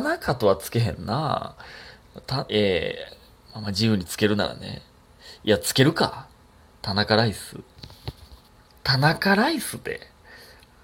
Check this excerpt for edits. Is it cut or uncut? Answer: uncut